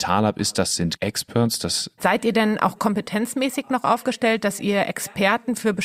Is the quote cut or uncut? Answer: cut